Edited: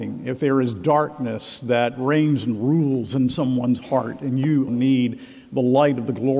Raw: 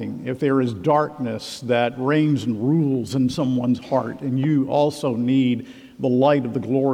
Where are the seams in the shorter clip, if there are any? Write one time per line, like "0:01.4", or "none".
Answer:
0:04.7

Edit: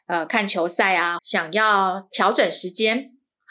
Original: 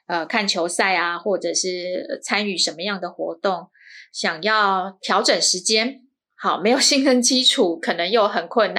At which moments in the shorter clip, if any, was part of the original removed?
0:01.2

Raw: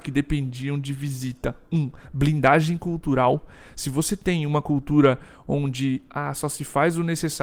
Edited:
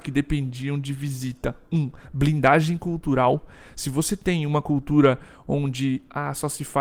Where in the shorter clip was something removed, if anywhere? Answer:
none

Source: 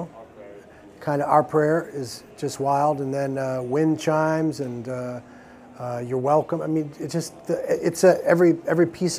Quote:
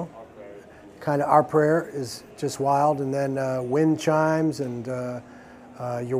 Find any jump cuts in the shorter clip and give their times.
none

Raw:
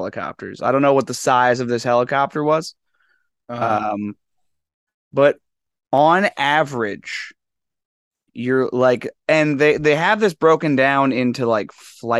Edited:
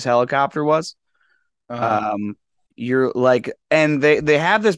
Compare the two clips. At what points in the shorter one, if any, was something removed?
0:02.7

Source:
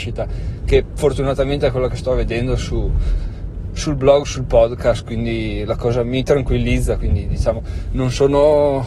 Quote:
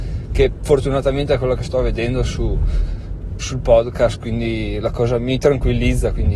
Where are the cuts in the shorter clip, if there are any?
0:03.4

